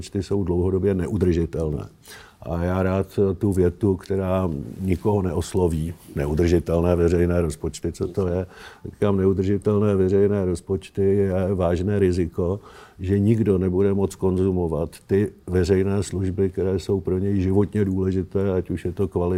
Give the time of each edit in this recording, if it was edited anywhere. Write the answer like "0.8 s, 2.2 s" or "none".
none